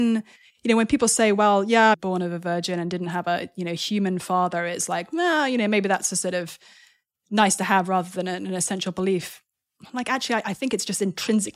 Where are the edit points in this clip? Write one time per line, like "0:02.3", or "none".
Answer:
0:01.9